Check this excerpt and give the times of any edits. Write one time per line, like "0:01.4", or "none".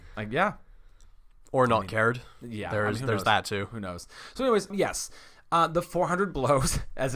0:04.7